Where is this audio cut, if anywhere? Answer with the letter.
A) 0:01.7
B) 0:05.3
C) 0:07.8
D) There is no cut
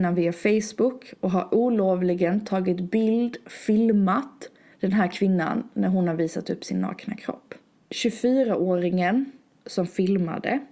C